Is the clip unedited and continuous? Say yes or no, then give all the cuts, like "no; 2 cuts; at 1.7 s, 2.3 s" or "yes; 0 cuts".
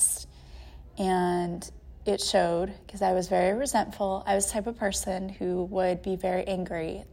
yes; 0 cuts